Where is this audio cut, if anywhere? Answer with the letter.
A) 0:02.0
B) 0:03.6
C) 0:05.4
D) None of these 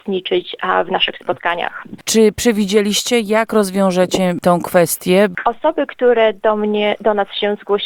A